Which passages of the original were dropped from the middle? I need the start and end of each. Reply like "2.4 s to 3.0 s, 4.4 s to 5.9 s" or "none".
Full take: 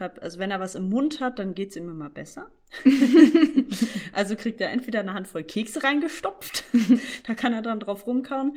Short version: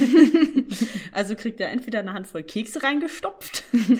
none

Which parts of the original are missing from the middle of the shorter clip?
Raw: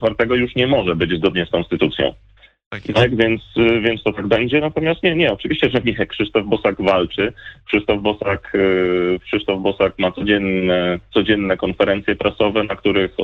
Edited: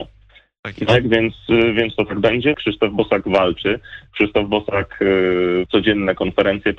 4.6 s to 6.1 s, 9.2 s to 11.1 s

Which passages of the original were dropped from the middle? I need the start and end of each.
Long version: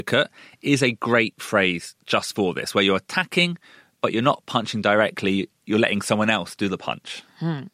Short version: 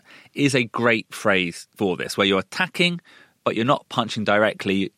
2.0 s to 2.3 s

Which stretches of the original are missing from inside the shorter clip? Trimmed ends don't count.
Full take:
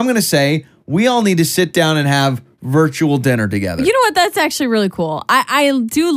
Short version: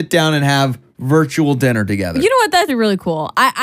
4.3 s to 4.6 s

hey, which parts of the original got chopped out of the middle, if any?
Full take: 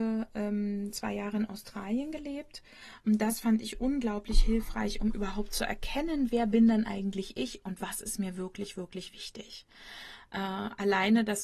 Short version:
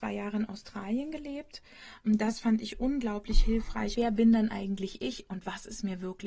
4.9 s to 6.3 s

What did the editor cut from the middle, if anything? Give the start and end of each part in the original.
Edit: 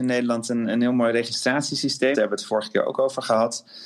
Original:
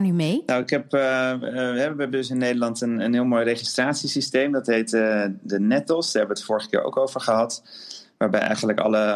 4.5 s to 6.1 s

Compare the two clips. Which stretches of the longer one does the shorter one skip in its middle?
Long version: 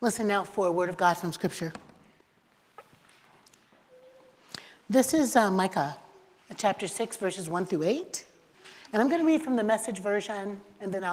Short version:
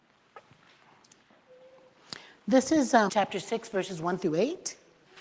5.5 s to 6.6 s

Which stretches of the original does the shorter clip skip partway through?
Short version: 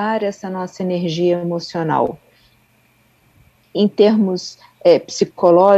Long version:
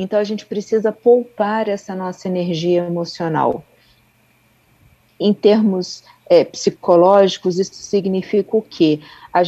none

